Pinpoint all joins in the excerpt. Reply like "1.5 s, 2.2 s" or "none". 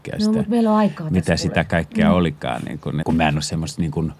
3.0 s